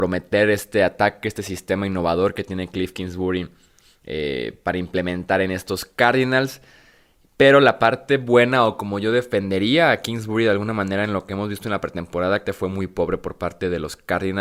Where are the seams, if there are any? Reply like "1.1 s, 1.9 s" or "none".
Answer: 12.5 s

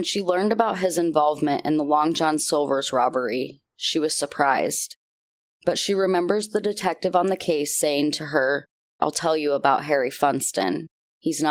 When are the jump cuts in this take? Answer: 9.0 s

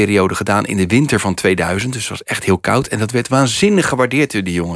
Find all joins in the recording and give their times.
none

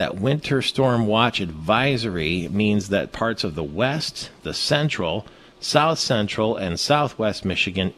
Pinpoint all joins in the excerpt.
none

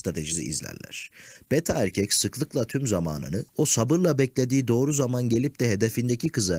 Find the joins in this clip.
3.5 s

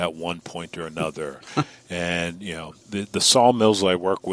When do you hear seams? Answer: 2.8 s

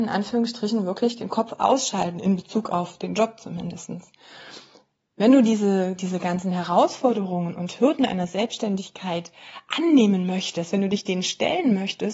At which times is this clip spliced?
none

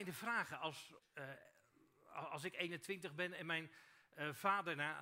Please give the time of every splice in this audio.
1.0 s

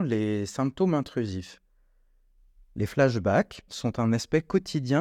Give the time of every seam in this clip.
3.7 s

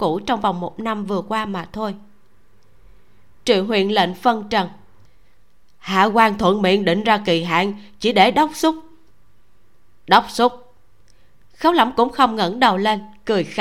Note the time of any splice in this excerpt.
none

